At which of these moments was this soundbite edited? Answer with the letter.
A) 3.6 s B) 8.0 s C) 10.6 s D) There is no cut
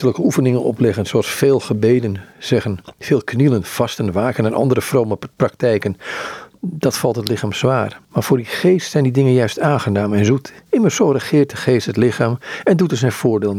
B